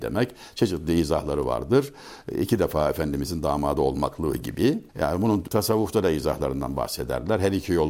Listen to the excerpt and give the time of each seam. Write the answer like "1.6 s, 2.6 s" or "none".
4.9 s